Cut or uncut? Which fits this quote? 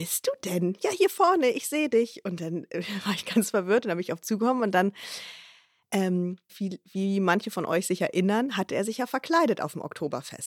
cut